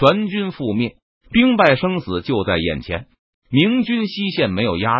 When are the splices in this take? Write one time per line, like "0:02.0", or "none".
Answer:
0:03.3